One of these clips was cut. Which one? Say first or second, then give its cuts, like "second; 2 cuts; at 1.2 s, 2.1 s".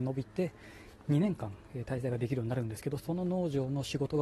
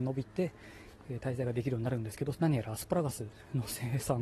second; 2 cuts; at 1.0 s, 2.3 s